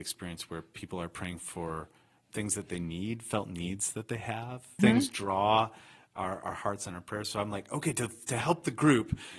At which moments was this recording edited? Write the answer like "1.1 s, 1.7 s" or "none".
4.8 s